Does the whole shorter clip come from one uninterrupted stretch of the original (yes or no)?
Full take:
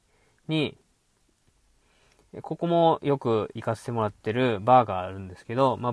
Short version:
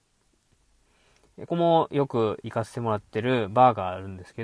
no